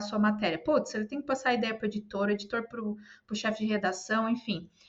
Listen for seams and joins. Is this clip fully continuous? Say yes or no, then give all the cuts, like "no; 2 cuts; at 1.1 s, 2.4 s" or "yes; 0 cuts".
yes; 0 cuts